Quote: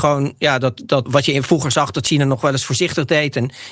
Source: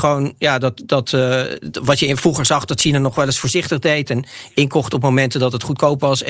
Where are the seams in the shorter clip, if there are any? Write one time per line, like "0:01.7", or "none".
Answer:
0:01.1